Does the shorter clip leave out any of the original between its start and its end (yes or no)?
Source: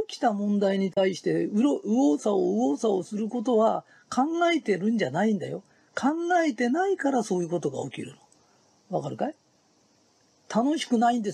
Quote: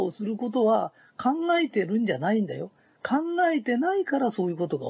no